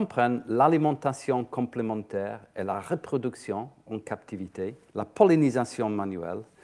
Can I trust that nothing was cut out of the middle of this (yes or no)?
no